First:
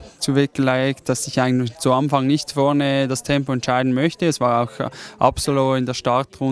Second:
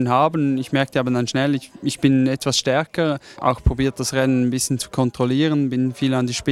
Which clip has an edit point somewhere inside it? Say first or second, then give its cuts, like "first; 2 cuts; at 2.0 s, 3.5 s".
second; 1 cut; at 3.4 s